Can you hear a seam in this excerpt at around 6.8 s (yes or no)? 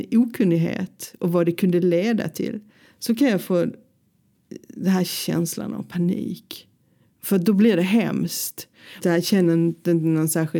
no